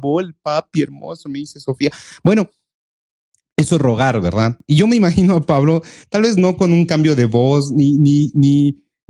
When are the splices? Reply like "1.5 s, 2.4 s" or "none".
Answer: none